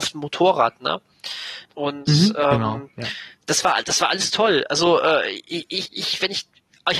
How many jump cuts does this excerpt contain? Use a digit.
2